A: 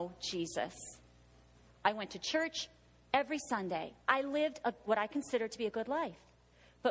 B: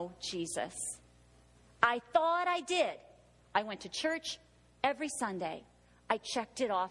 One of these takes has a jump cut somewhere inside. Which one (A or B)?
A